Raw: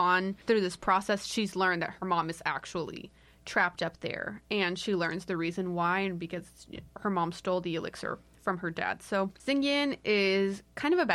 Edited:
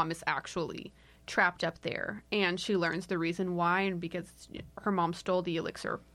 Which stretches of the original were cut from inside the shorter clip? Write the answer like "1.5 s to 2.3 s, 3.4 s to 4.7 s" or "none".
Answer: none